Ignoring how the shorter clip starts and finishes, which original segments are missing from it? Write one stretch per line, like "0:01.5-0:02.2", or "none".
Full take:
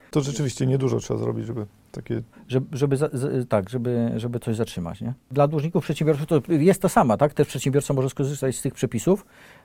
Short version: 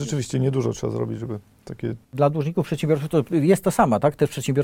0:02.3-0:05.2